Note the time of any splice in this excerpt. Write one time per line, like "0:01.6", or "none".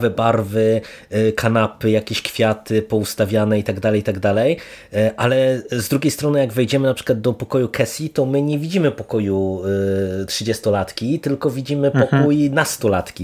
none